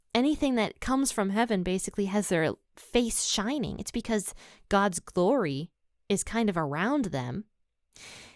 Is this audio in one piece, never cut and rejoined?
yes; 0 cuts

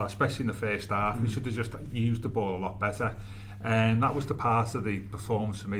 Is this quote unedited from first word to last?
yes; 0 cuts

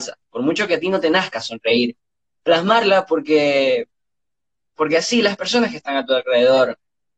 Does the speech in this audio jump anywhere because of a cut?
no; 0 cuts

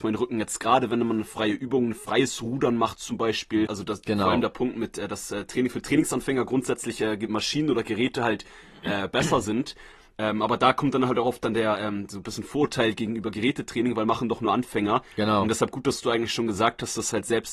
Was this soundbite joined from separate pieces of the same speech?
yes; 1 cut; at 3.7 s

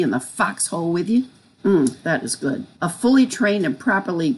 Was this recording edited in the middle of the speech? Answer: yes; 2 cuts; at 1.6 s, 2.7 s

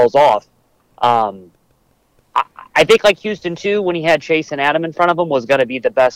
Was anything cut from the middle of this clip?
no; 0 cuts

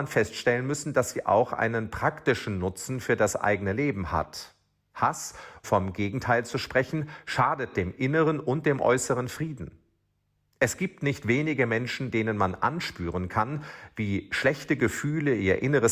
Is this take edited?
yes; 1 cut; at 5.6 s

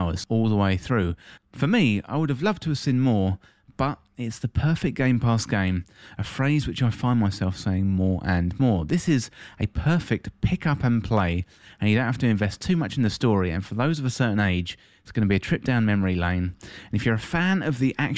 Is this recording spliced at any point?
no; 0 cuts

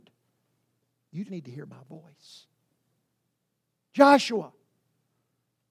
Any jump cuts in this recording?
yes; 1 cut; at 1.3 s

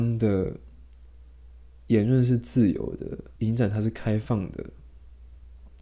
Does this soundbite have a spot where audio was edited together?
yes; 1 cut; at 3.4 s

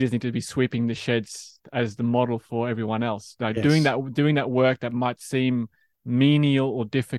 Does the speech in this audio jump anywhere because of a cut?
no; 0 cuts

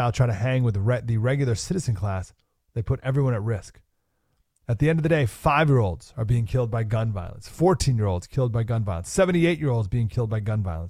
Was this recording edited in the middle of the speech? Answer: no; 0 cuts

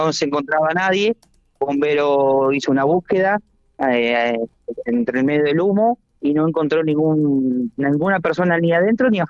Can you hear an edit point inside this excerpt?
no; 0 cuts

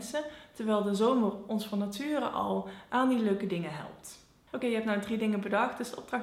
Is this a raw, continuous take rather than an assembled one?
yes; 0 cuts

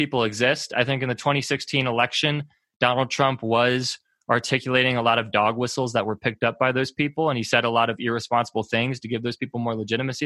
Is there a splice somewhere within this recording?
no; 0 cuts

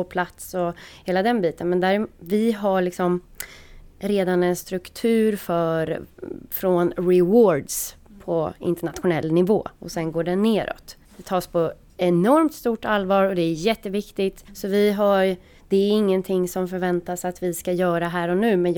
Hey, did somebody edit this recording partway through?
yes; 2 cuts; at 11.0 s, 14.5 s

